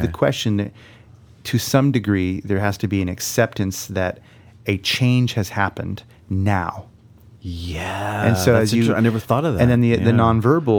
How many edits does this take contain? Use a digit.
0